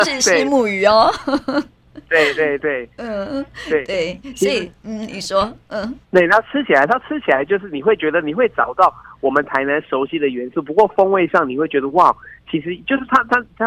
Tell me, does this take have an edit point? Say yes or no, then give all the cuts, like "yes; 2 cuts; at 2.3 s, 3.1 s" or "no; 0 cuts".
yes; 1 cut; at 6.0 s